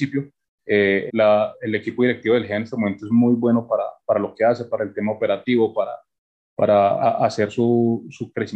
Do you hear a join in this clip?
yes; 1 cut; at 1.1 s

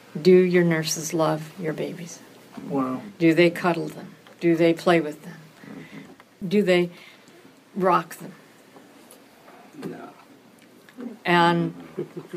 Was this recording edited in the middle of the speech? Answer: no; 0 cuts

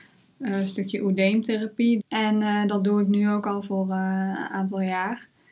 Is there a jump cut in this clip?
yes; 1 cut; at 2.0 s

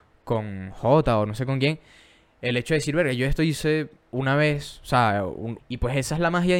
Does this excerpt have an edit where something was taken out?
yes; 1 cut; at 5.6 s

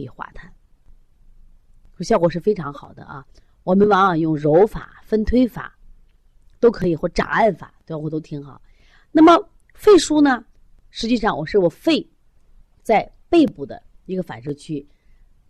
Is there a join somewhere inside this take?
no; 0 cuts

